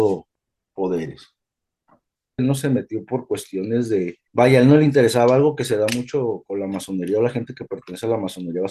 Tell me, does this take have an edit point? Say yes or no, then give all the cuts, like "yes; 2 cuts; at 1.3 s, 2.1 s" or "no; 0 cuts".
yes; 2 cuts; at 2.4 s, 4.3 s